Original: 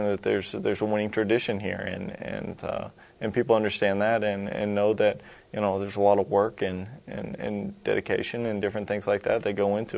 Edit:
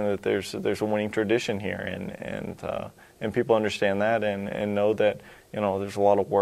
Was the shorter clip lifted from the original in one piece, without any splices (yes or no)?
yes